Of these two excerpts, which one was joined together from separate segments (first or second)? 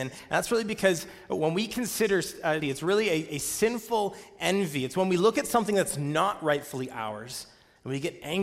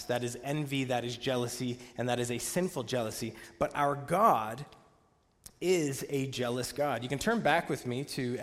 first